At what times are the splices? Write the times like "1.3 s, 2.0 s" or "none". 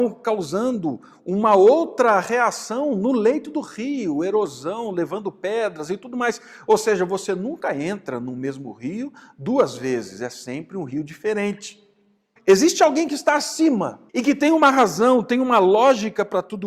12.4 s, 14.1 s